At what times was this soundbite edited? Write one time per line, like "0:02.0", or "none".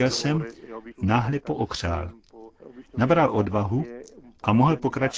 0:00.9